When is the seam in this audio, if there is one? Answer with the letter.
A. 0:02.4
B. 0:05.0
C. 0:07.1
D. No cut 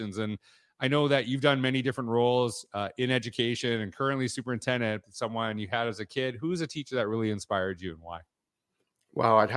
B